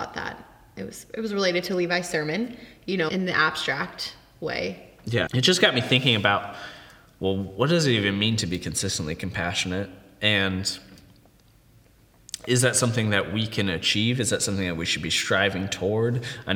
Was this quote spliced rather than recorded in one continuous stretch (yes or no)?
yes